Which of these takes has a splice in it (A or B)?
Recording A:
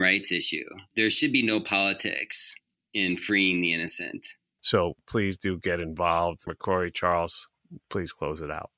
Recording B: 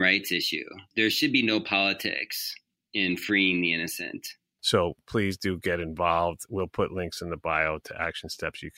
A